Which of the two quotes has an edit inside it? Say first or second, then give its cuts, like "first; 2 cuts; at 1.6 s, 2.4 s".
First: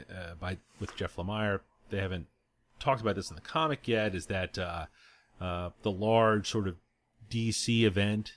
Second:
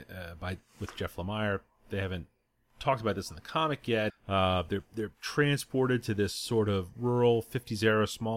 second; 1 cut; at 4.1 s